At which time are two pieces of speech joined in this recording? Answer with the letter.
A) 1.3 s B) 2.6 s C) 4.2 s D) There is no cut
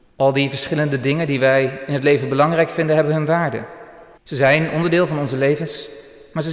C